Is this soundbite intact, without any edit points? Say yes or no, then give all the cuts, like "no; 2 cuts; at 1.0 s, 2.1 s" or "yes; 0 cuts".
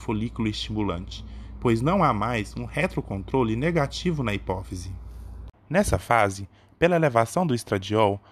no; 1 cut; at 5.5 s